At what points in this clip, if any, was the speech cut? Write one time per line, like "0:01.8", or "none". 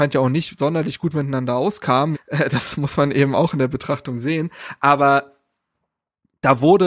0:02.1